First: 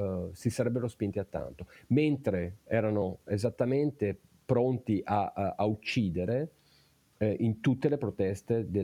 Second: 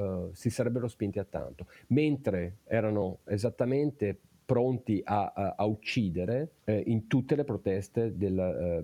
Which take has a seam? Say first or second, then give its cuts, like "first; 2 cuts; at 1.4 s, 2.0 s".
second; 1 cut; at 6.6 s